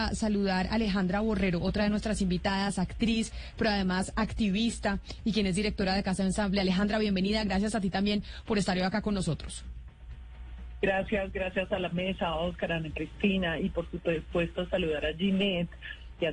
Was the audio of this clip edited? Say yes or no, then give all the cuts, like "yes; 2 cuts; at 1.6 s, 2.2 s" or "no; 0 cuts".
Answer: no; 0 cuts